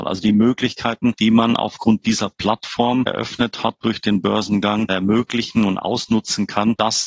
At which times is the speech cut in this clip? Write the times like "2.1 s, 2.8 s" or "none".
none